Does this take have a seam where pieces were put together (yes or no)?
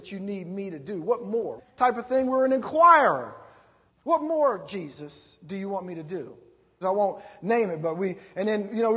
yes